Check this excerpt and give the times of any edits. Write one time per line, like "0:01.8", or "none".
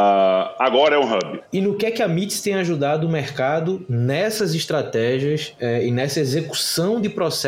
0:01.4